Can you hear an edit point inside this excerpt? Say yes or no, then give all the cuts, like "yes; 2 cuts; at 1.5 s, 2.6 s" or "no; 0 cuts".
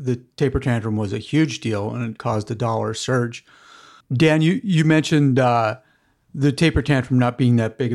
yes; 1 cut; at 4.0 s